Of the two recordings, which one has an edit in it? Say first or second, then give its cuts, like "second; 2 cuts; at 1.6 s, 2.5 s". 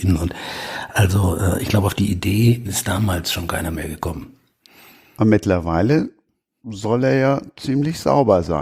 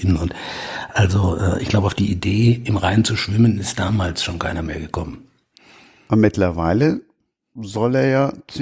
first; 1 cut; at 2.6 s